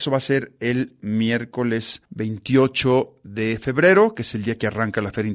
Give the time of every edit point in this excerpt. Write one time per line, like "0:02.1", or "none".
0:02.0